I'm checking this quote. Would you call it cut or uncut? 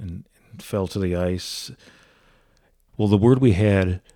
cut